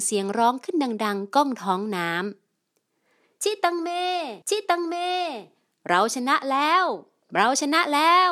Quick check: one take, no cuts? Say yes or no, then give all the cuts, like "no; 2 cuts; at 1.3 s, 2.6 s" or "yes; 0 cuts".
no; 1 cut; at 4.4 s